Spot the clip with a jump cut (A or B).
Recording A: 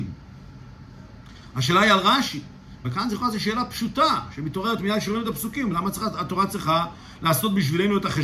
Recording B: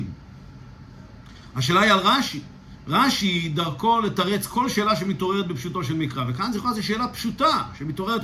A